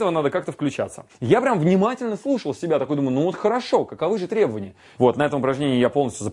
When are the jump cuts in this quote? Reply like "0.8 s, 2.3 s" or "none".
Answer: 1.1 s, 5.0 s